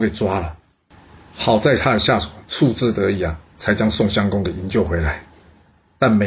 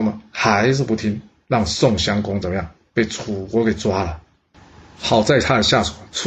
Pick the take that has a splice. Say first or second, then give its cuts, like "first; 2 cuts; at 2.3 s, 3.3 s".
second; 1 cut; at 1.4 s